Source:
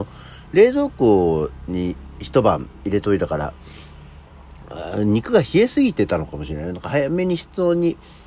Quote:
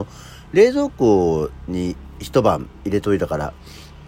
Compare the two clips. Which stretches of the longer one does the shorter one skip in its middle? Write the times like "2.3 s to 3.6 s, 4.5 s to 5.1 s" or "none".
none